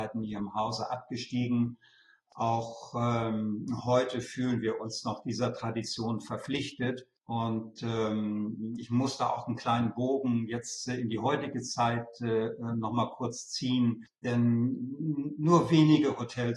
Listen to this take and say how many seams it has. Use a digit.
0